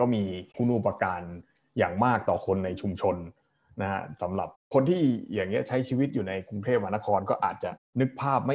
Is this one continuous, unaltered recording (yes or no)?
yes